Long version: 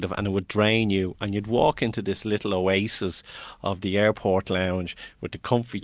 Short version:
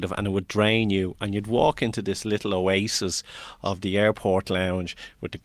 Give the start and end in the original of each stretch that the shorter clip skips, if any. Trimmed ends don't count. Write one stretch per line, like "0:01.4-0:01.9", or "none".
none